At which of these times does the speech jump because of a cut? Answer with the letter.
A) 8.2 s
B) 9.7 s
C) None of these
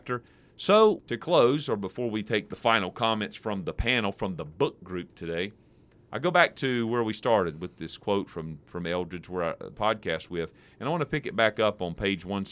B